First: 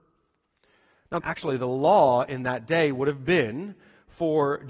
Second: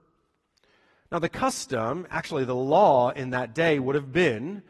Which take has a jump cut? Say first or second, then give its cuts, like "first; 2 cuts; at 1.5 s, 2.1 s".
first; 1 cut; at 1.2 s